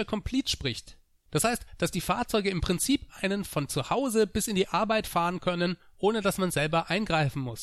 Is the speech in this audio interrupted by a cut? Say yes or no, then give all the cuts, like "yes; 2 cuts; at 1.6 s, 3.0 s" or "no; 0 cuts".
no; 0 cuts